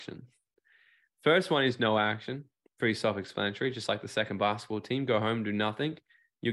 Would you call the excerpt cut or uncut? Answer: uncut